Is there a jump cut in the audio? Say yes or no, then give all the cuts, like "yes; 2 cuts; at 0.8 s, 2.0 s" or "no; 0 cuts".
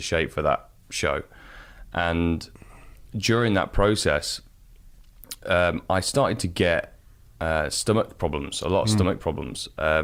no; 0 cuts